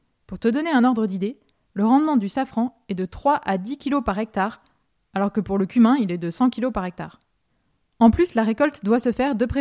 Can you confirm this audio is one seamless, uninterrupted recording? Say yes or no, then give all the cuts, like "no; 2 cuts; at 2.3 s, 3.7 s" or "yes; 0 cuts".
yes; 0 cuts